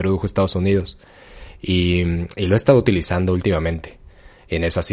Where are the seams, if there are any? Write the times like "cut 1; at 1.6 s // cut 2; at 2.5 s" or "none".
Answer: none